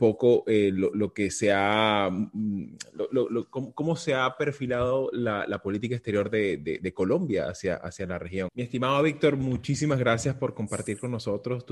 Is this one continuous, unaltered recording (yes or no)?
no